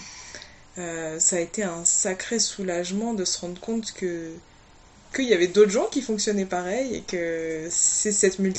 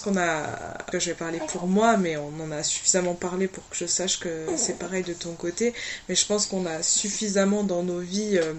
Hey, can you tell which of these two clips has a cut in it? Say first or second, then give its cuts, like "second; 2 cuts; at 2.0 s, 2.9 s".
second; 1 cut; at 0.9 s